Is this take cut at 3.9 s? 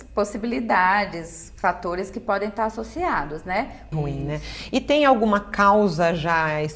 yes; 1 cut; at 3.9 s

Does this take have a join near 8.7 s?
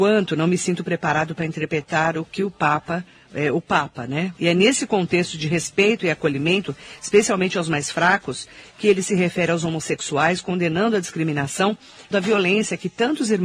no; 2 cuts; at 4.4 s, 12.1 s

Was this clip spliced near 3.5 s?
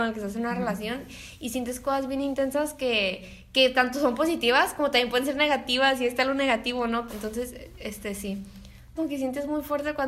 no; 2 cuts; at 7.1 s, 9.0 s

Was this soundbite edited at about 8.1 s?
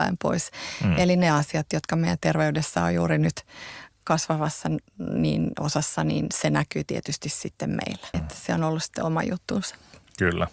yes; 1 cut; at 8.1 s

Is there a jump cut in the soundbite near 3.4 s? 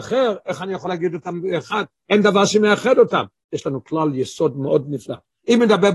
yes; 1 cut; at 3.4 s

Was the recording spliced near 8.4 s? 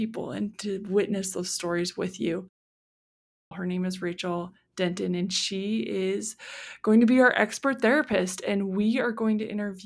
no; 1 cut; at 3.5 s

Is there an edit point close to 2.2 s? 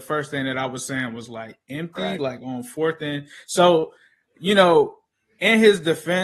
no; 0 cuts

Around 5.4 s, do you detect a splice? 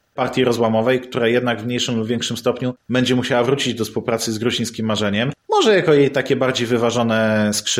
no; 0 cuts

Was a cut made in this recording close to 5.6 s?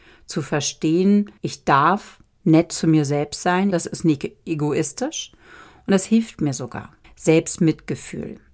no; 3 cuts; at 1.4 s, 3.7 s, 7.0 s

